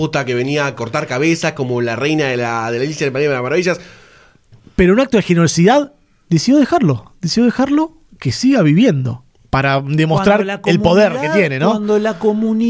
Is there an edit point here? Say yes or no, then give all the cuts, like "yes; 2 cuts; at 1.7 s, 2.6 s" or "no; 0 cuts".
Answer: no; 0 cuts